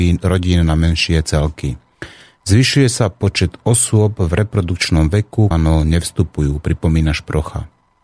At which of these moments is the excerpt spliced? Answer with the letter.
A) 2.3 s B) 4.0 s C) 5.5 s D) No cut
C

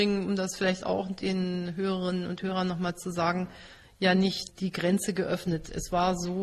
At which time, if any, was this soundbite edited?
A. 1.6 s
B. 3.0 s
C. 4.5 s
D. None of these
C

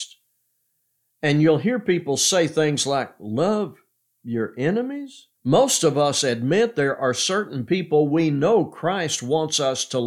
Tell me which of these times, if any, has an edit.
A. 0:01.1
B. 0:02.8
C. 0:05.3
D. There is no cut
C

